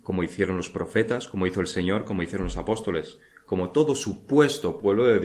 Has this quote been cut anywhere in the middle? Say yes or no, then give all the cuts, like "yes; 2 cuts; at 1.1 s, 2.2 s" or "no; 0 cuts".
no; 0 cuts